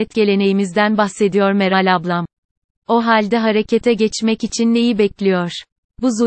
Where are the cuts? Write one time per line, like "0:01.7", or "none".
0:02.7